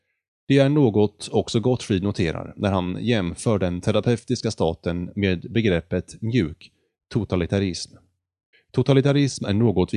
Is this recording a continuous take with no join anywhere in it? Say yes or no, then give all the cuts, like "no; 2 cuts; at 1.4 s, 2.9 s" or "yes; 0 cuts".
no; 1 cut; at 8.5 s